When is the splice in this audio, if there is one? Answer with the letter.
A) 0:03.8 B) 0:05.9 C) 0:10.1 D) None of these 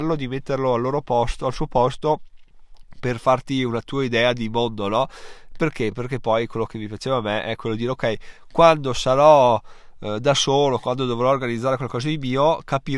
D